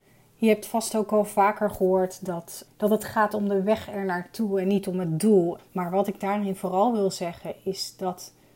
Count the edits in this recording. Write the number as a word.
two